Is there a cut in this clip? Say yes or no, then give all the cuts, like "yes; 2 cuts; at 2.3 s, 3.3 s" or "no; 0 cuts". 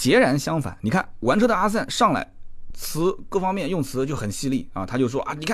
no; 0 cuts